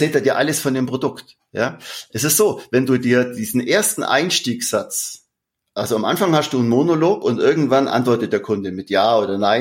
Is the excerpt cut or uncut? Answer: uncut